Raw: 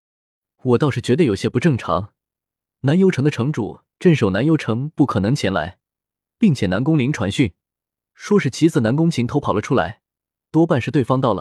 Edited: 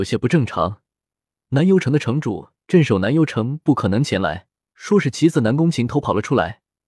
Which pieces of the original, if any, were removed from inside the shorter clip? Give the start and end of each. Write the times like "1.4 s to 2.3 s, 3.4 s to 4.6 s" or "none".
6.0 s to 8.1 s